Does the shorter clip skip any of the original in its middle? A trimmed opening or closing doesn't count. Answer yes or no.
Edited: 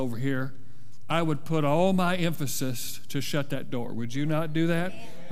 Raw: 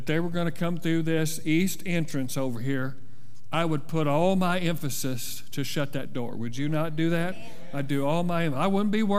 no